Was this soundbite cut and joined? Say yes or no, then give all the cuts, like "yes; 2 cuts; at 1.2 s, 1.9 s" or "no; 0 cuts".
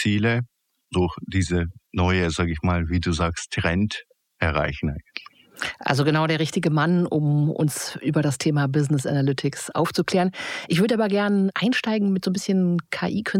no; 0 cuts